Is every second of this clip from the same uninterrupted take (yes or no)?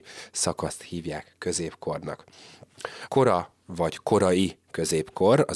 no